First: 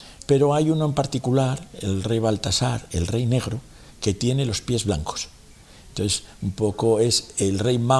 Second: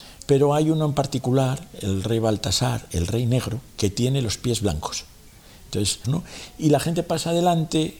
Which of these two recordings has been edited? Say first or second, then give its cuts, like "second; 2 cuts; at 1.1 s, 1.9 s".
second; 2 cuts; at 3.7 s, 6.0 s